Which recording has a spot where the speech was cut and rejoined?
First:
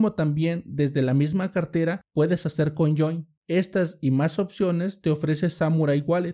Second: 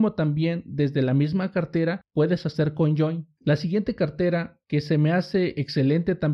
second; 1 cut; at 3.4 s

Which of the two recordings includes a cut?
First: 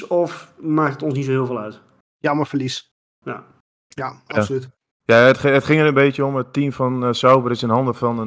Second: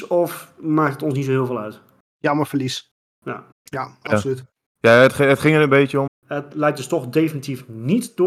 second; 2 cuts; at 3.5 s, 6.1 s

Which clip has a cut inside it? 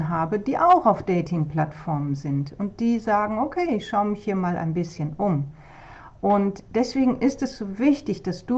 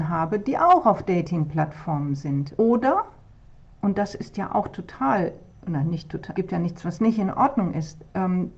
second; 2 cuts; at 2.6 s, 6.3 s

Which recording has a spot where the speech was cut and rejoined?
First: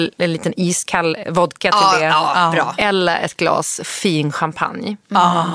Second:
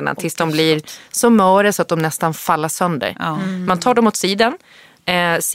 first; 1 cut; at 1.2 s

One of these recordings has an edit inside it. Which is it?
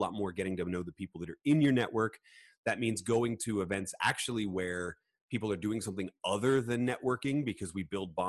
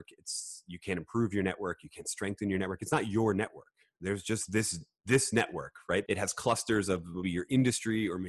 second; 2 cuts; at 6.1 s, 7.2 s

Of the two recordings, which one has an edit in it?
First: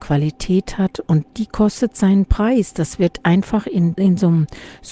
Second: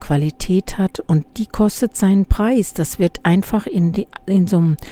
first; 1 cut; at 3.9 s

